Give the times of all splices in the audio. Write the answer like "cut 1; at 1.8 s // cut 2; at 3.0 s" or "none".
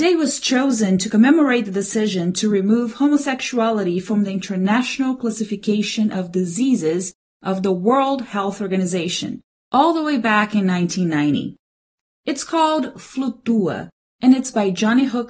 cut 1; at 12.1 s